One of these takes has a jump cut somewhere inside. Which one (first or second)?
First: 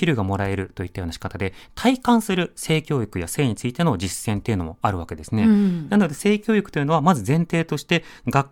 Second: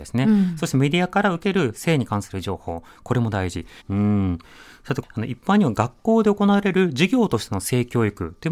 second